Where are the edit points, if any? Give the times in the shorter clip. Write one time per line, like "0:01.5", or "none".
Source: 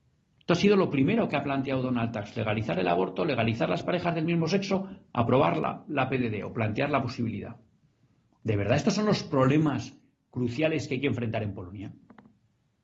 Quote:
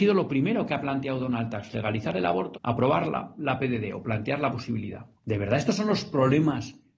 0:02.5
0:05.1